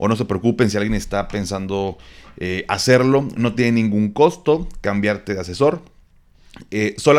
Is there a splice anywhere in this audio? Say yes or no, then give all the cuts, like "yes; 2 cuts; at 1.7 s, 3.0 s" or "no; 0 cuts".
no; 0 cuts